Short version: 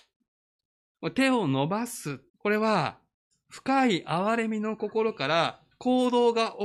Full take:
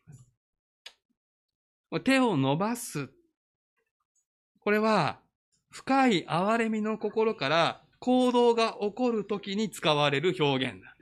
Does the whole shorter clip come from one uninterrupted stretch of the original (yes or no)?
no